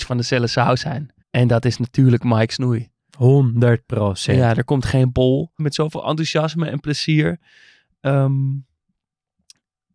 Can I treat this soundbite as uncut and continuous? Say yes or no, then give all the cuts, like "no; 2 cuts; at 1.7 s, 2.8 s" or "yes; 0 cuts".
no; 2 cuts; at 1.2 s, 5.6 s